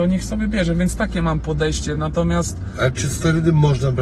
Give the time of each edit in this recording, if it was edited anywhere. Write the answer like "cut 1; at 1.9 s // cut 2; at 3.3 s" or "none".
none

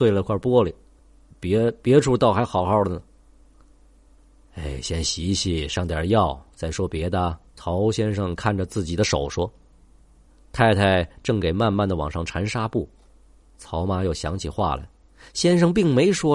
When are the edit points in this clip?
cut 1; at 7.5 s // cut 2; at 13.4 s

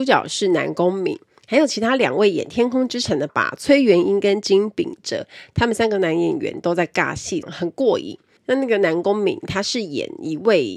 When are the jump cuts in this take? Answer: cut 1; at 3.3 s // cut 2; at 7.4 s

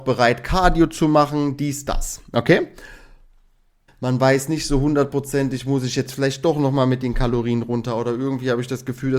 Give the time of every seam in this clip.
cut 1; at 3.9 s

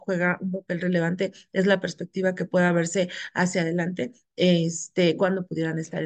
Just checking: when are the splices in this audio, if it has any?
none

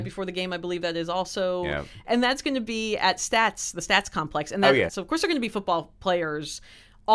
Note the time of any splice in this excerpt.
cut 1; at 2.0 s // cut 2; at 4.9 s

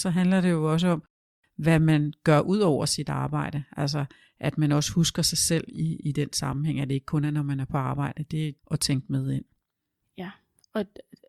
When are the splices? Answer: cut 1; at 8.6 s

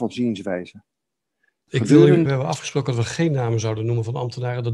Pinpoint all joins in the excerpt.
cut 1; at 2.3 s

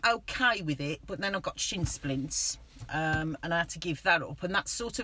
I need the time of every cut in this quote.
none

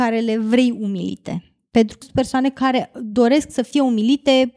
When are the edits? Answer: cut 1; at 2.0 s

